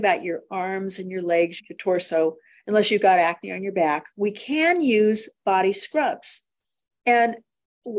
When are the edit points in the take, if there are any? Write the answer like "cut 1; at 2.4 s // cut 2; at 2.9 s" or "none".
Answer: cut 1; at 1.6 s // cut 2; at 4.1 s // cut 3; at 6.9 s